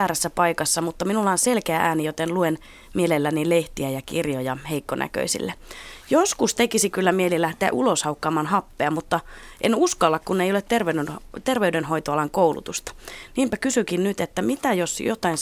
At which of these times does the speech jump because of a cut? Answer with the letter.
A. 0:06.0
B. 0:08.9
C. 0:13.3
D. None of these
D